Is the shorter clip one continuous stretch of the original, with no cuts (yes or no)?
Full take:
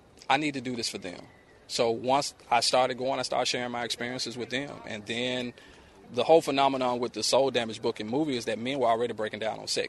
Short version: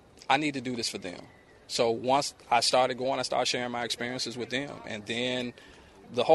yes